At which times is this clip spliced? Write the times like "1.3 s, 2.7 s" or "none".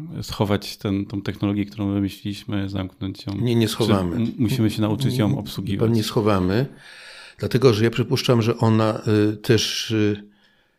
none